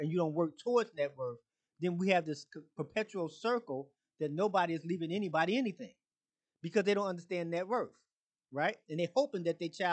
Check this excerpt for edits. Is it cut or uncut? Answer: uncut